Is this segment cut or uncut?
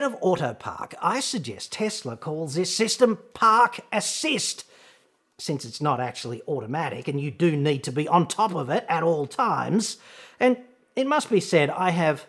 uncut